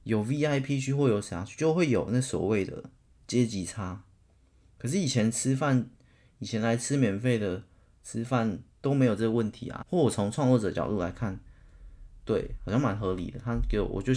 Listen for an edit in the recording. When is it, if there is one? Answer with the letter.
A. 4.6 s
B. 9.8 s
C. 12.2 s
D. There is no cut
B